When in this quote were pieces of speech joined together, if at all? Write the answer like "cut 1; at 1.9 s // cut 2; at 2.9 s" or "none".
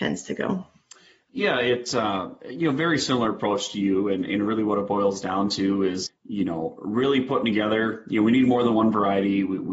cut 1; at 6.1 s